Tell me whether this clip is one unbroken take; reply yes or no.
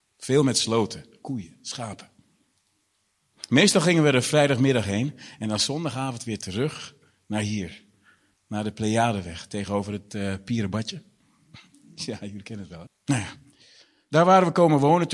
no